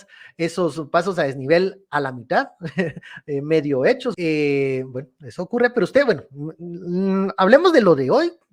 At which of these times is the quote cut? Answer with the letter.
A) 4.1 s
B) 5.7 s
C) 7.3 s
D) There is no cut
A